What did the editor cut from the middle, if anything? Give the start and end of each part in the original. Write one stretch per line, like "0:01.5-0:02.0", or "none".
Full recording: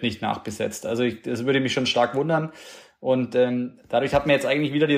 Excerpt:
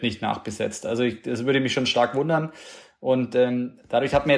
none